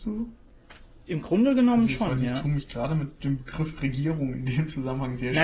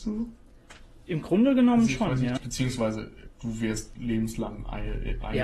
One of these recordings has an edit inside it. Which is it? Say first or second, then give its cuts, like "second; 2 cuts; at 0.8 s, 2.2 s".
second; 1 cut; at 2.4 s